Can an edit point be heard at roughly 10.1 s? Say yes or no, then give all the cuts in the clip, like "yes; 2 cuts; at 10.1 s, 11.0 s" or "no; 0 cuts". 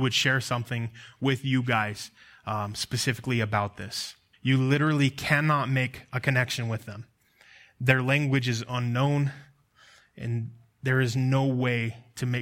no; 1 cut; at 4.3 s